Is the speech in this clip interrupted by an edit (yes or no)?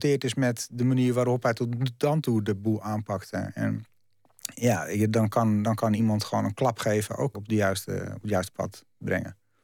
yes